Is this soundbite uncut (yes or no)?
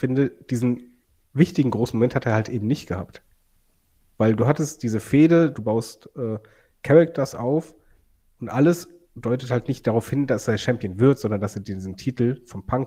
no